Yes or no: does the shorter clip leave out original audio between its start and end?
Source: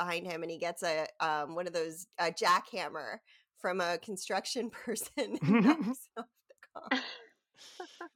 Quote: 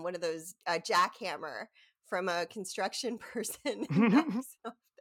no